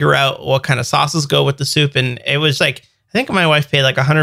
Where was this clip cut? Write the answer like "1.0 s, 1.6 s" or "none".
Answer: 2.6 s